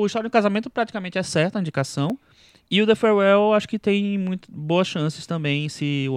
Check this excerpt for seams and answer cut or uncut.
uncut